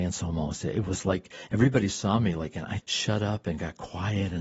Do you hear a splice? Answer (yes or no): yes